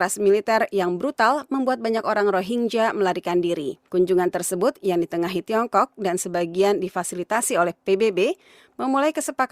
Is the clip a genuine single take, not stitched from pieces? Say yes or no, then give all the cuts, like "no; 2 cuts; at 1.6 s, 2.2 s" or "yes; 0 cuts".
no; 1 cut; at 3.9 s